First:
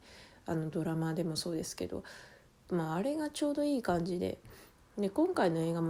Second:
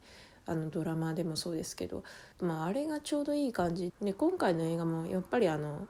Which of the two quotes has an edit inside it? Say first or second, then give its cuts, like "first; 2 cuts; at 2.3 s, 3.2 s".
second; 2 cuts; at 2.3 s, 3.9 s